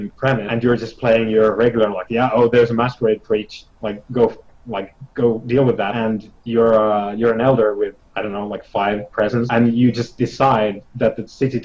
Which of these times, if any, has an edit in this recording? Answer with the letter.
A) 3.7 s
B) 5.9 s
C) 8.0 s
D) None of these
C